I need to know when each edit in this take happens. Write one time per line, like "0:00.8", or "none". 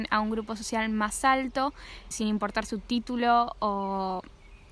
0:02.1